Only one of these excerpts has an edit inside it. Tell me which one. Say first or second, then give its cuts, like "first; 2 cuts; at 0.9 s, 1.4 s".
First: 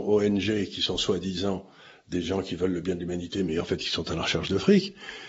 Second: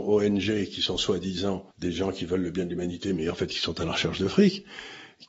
second; 1 cut; at 1.7 s